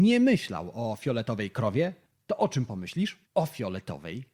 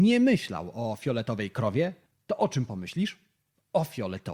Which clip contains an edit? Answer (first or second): first